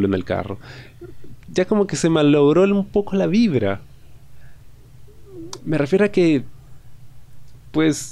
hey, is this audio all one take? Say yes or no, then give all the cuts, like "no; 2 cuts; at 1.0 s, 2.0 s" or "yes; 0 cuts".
no; 1 cut; at 1.4 s